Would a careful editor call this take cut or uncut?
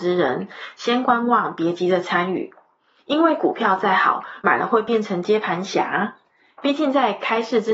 cut